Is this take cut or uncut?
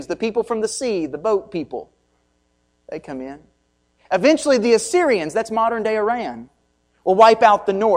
uncut